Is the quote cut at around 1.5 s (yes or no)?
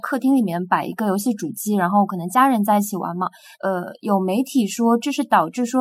no